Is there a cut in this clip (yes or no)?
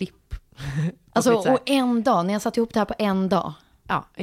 no